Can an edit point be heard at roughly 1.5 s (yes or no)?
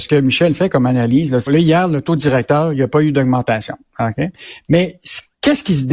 yes